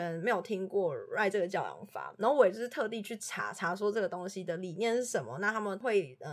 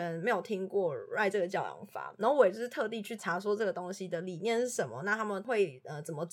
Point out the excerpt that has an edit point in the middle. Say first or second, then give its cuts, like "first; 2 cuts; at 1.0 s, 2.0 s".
second; 1 cut; at 3.2 s